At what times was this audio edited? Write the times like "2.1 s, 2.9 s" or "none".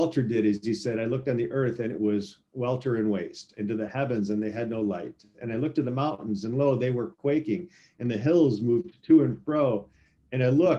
none